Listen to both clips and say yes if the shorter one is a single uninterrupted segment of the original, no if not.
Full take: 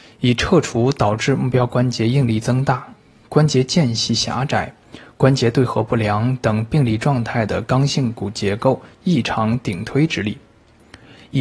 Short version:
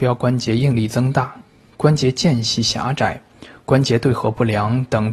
yes